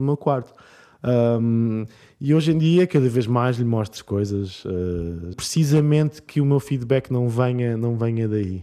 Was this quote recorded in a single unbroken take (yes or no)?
no